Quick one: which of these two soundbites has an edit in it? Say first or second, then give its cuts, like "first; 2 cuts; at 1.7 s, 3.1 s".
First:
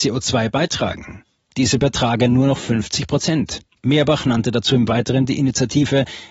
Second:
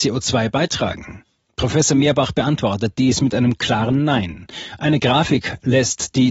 first; 1 cut; at 1.5 s